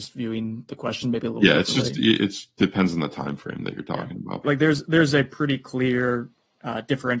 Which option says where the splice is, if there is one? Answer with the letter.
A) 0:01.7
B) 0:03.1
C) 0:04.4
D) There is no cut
C